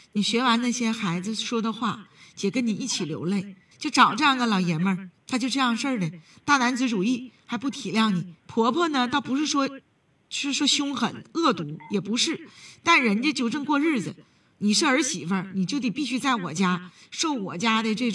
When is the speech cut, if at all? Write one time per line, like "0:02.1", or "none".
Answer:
0:03.7
0:08.4